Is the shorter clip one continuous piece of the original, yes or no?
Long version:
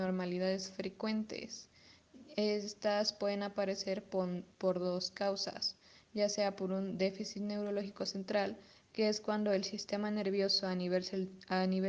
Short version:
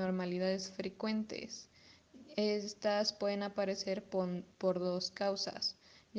yes